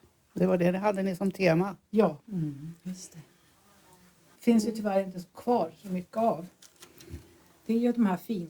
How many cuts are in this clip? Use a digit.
2